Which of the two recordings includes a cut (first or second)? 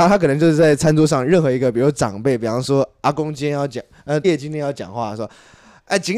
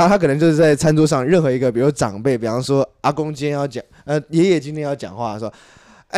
first